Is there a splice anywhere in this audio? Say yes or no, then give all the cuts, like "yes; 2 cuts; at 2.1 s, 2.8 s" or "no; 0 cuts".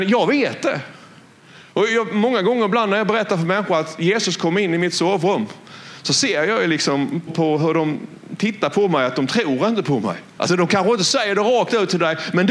yes; 2 cuts; at 7.3 s, 10.4 s